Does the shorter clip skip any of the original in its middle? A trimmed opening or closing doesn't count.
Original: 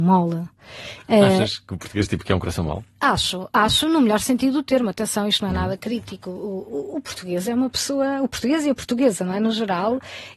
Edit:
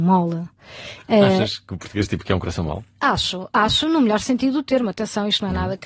no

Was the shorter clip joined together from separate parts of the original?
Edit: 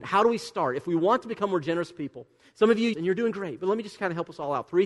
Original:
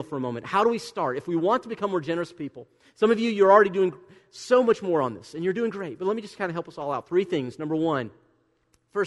yes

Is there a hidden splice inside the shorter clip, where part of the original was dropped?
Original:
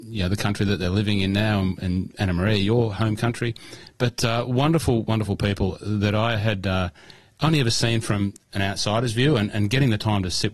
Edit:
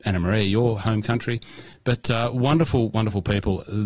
no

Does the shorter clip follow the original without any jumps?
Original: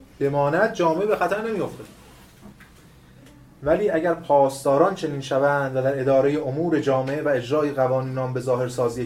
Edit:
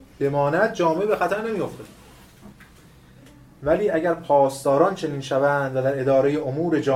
yes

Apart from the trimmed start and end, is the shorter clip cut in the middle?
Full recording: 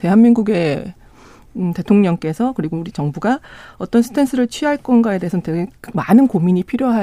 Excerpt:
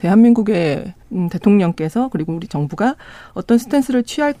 yes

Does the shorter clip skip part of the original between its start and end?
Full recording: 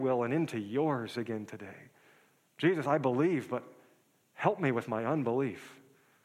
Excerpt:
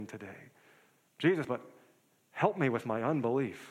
yes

